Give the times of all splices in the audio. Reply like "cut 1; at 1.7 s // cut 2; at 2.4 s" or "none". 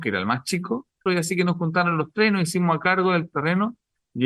cut 1; at 1.1 s